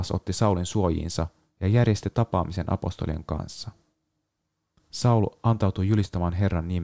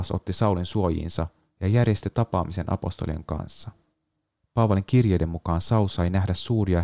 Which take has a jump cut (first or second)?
second